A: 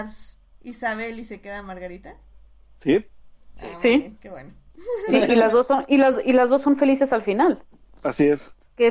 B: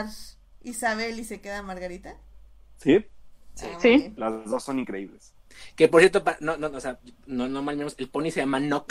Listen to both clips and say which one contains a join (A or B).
B